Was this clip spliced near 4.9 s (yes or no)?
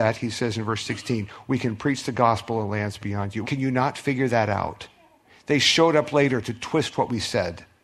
no